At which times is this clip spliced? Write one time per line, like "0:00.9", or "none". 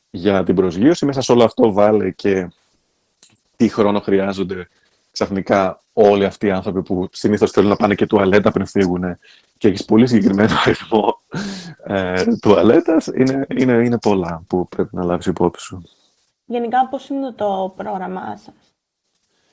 0:16.3